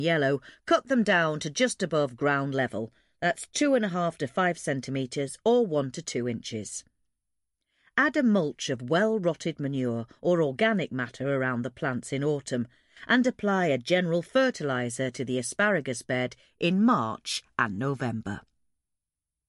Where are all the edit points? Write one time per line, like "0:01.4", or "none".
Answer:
none